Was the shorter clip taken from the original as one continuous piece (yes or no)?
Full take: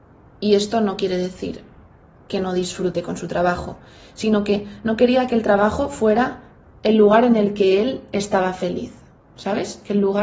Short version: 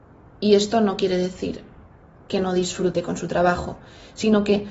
yes